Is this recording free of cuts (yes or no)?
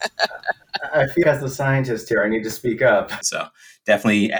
no